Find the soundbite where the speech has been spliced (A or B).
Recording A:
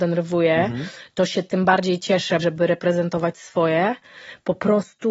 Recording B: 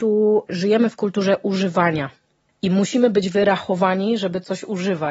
A